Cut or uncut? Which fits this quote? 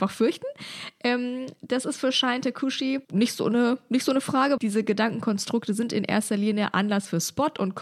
cut